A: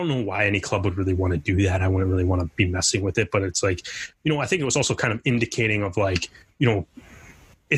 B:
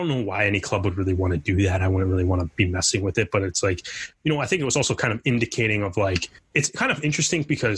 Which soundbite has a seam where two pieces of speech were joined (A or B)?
B